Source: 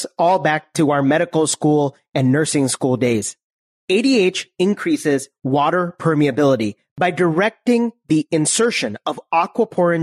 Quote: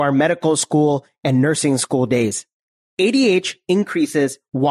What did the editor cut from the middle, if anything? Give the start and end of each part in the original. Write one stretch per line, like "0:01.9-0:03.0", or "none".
none